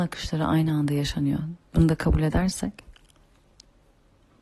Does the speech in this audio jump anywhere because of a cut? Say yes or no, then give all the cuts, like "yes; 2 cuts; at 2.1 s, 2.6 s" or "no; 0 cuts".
yes; 1 cut; at 1.6 s